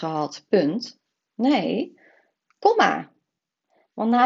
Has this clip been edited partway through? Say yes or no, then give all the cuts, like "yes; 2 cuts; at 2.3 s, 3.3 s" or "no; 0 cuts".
no; 0 cuts